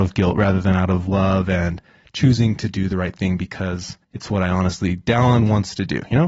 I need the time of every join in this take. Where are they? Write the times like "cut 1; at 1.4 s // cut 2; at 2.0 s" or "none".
cut 1; at 4.0 s